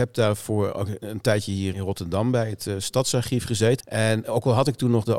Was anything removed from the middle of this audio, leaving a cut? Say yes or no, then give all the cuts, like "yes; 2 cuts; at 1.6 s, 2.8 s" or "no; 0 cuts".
yes; 2 cuts; at 1.7 s, 3.8 s